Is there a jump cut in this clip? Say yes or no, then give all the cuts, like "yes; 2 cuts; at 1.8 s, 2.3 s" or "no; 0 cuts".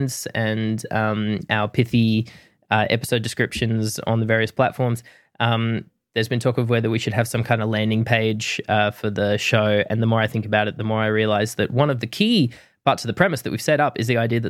no; 0 cuts